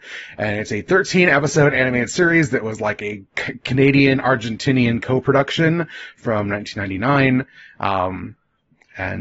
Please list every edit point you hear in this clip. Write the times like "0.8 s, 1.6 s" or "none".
none